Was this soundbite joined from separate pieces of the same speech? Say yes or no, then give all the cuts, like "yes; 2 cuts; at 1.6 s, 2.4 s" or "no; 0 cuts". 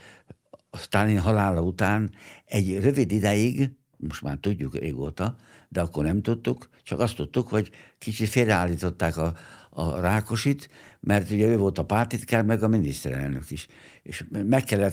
no; 0 cuts